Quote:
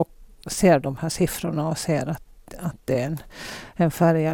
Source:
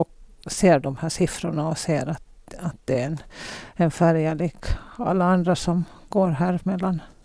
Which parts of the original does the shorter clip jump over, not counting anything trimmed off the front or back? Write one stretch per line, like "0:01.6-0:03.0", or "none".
none